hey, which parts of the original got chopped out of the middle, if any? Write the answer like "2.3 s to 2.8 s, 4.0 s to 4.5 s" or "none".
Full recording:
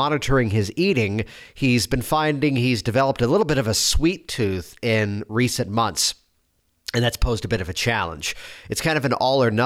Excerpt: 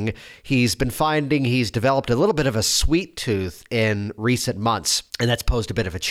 6.2 s to 6.8 s